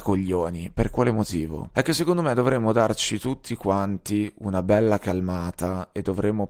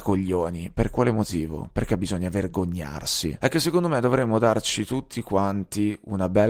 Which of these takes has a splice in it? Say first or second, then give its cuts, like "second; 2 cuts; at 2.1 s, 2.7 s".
first; 1 cut; at 1.7 s